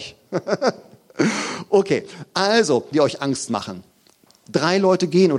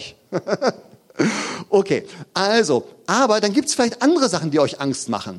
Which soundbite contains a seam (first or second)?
first